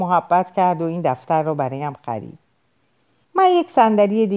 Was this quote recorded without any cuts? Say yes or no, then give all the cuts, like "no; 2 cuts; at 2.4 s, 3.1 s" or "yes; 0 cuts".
no; 1 cut; at 3.2 s